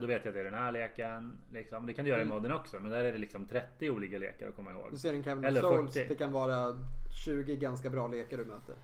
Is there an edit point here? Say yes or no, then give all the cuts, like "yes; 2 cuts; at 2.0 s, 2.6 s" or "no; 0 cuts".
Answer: no; 0 cuts